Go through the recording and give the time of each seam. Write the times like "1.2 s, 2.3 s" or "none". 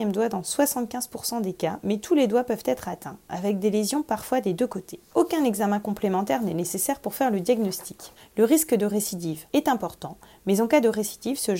8.2 s